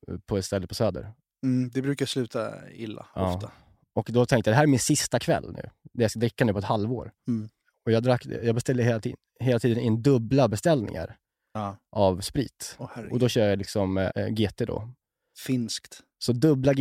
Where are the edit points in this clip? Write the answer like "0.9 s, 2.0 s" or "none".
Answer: 14.1 s